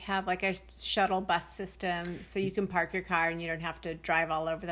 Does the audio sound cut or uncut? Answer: uncut